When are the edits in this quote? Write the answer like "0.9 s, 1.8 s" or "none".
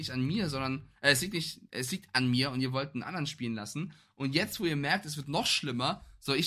none

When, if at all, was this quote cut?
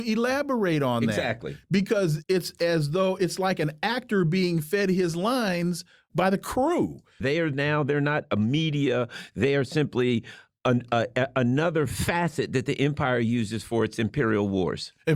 7.2 s

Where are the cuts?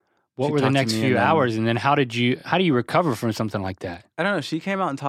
none

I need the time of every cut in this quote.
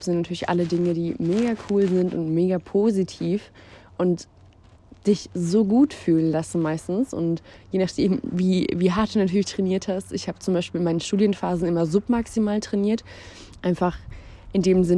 13.6 s

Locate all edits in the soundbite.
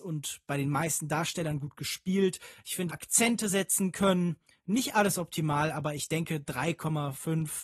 2.9 s

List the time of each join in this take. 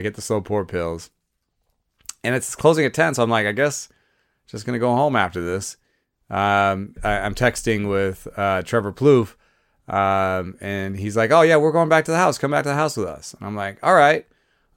7.0 s

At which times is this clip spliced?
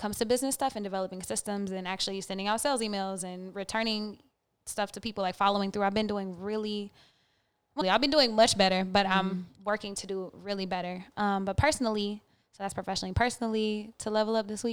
7.8 s

